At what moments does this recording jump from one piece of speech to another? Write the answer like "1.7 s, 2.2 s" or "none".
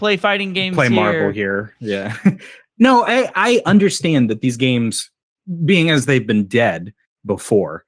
none